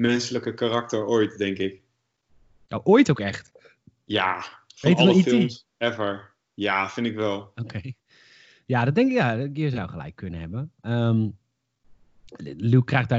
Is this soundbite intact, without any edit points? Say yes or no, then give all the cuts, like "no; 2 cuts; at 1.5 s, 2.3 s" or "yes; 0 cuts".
yes; 0 cuts